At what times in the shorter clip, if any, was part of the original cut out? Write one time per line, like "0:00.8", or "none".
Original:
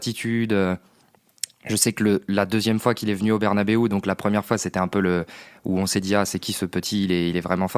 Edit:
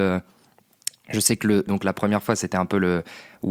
0:01.7

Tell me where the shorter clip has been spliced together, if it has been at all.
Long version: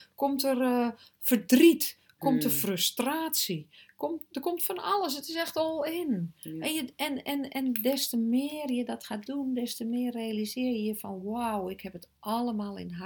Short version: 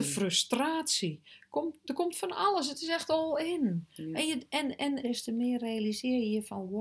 0:05.0

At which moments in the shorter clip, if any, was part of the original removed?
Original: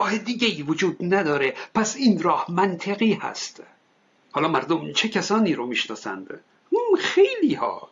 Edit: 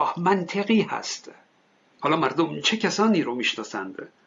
none

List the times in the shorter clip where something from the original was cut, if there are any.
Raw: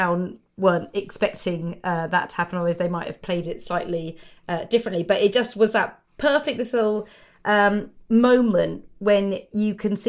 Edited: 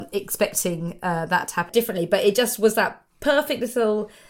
0:01.7

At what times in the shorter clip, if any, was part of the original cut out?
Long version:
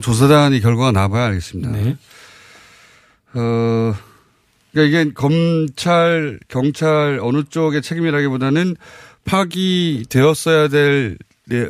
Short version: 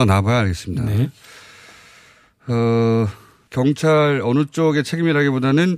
0:03.5

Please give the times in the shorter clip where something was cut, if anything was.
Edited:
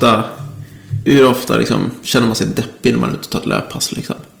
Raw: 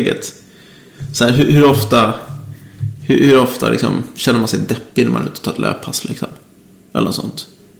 0:01.1

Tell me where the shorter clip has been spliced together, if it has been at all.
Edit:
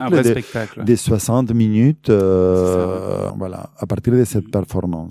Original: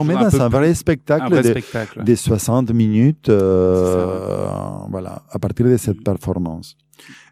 0:03.3

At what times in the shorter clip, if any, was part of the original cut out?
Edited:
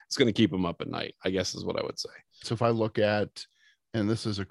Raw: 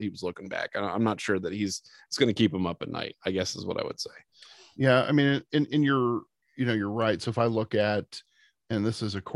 0:02.4

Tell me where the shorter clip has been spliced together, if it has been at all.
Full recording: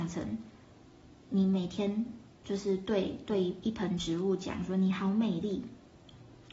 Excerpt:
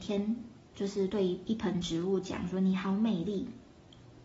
0:01.1

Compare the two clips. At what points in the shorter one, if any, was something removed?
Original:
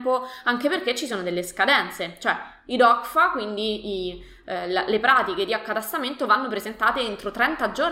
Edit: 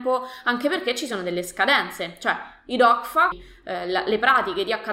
0:03.3

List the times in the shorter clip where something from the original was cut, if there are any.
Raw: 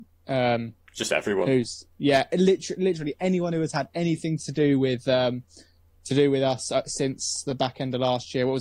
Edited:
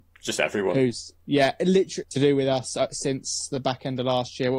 0:02.0

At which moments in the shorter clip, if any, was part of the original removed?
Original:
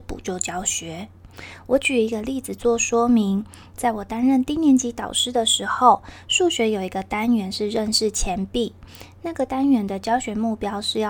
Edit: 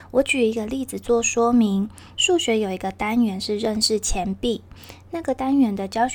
0:02.1

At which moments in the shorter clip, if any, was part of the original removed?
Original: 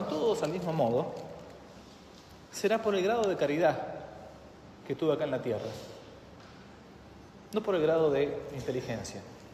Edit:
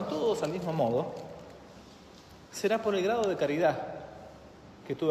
none

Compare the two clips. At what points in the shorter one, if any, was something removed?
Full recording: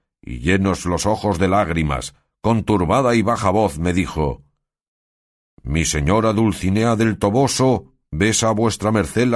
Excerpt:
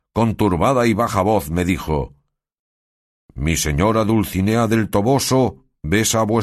none

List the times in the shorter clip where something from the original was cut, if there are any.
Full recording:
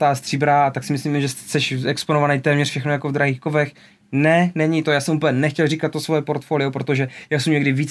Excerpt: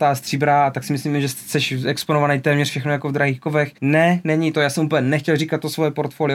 0:03.8

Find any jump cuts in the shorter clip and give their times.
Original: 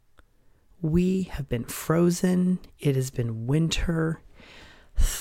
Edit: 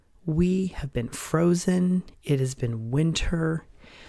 none

